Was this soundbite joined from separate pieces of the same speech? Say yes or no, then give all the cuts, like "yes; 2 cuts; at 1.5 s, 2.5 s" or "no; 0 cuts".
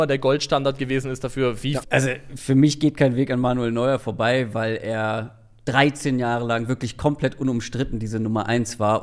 yes; 1 cut; at 1.8 s